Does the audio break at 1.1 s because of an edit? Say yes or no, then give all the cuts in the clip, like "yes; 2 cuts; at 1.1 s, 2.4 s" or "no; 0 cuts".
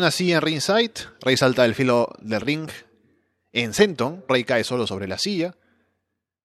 no; 1 cut; at 4.3 s